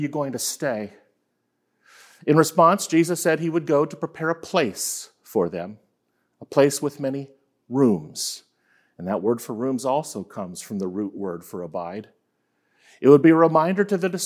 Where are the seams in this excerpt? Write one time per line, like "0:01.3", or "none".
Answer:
none

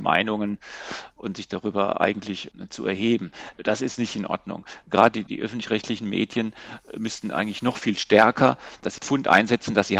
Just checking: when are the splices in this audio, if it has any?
0:05.3

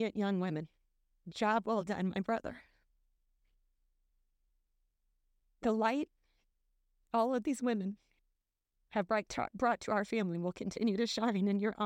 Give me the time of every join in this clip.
none

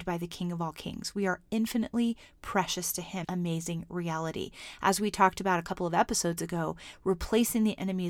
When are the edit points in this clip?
0:03.2

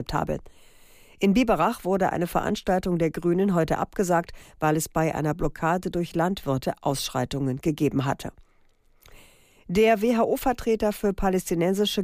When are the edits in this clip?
none

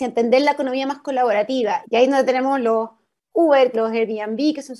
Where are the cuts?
0:01.8
0:03.7

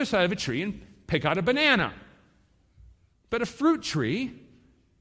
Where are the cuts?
0:03.1

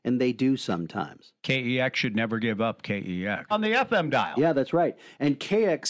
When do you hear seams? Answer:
0:01.4
0:03.5

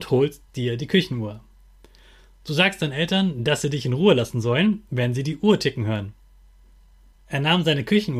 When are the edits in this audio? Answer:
0:07.1

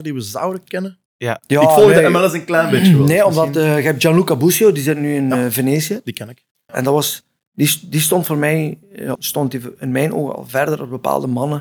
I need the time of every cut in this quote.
0:06.7
0:09.2

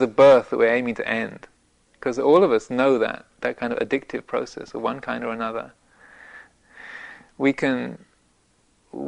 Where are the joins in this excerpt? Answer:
0:06.5

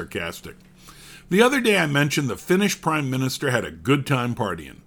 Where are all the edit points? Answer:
none

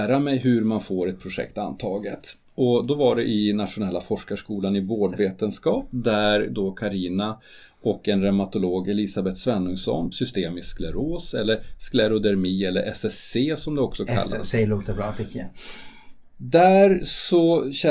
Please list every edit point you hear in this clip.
0:10.1

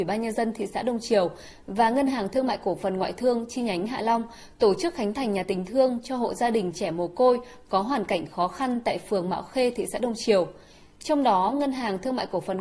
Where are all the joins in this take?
none

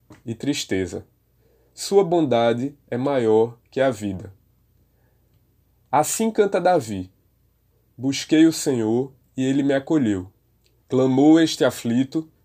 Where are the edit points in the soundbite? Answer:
0:10.8

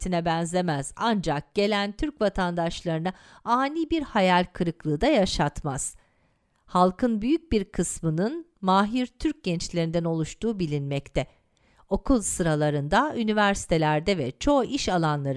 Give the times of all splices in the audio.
none

